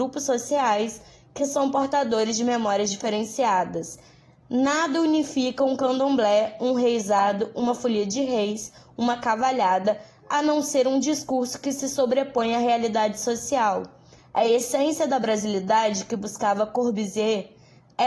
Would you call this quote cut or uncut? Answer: cut